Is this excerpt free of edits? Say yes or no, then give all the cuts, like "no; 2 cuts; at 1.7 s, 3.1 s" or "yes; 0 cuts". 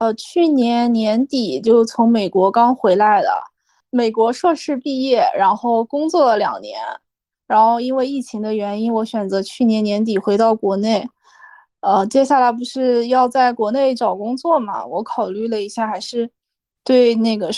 yes; 0 cuts